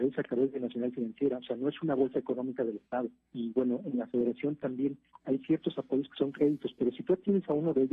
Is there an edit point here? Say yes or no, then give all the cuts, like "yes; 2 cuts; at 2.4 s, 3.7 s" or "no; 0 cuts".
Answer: yes; 1 cut; at 3.3 s